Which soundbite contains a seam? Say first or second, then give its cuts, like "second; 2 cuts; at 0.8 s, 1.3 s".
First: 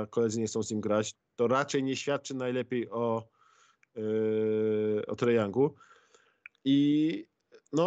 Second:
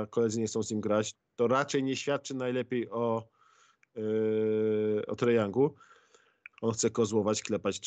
second; 1 cut; at 6.5 s